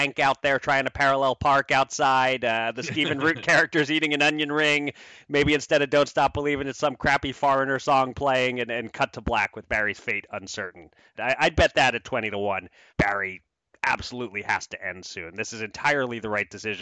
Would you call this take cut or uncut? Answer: cut